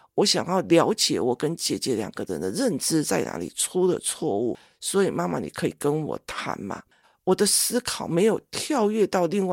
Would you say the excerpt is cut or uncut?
cut